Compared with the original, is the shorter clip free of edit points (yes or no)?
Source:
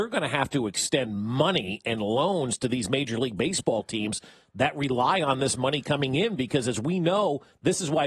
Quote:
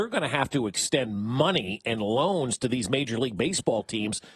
yes